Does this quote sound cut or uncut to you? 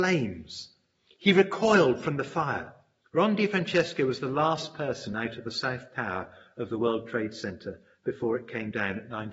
cut